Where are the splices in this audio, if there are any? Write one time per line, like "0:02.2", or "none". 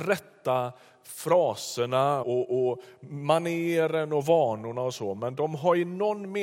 0:02.2